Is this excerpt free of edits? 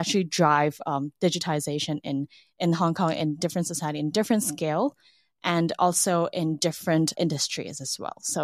no; 1 cut; at 7.1 s

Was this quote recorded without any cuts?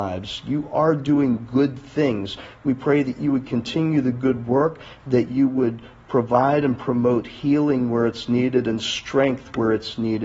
yes; 0 cuts

